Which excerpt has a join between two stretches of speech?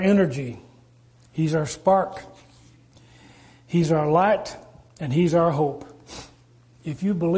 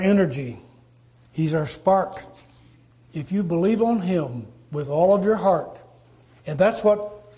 second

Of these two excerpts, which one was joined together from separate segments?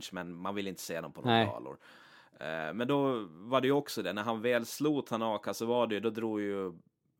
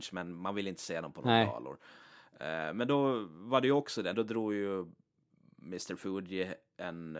second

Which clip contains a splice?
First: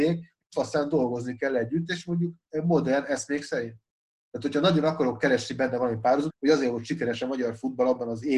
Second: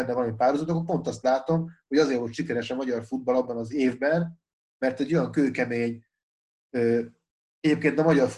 first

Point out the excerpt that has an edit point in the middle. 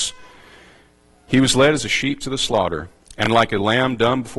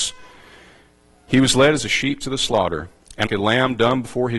second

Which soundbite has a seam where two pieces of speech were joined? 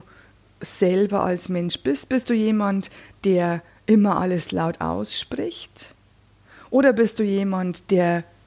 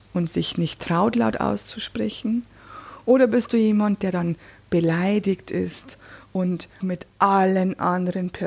second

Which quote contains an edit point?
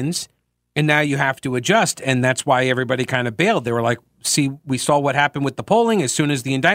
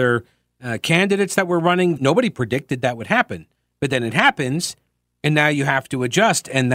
second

